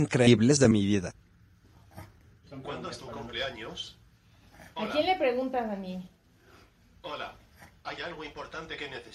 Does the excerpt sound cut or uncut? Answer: uncut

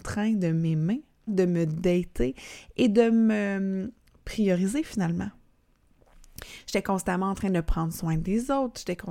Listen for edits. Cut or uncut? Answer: cut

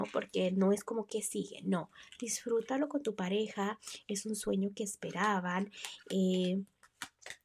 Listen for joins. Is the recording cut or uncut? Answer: cut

